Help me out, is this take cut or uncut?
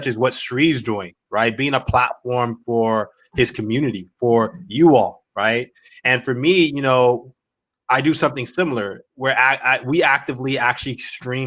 uncut